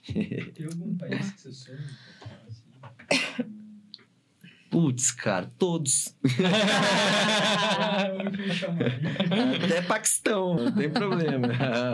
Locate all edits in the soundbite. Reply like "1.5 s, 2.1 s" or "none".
10.6 s